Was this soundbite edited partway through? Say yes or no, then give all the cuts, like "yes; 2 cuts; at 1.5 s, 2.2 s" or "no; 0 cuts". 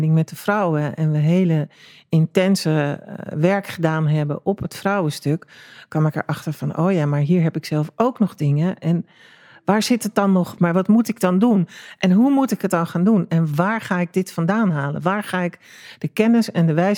yes; 1 cut; at 10.6 s